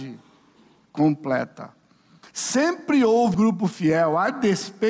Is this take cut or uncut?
cut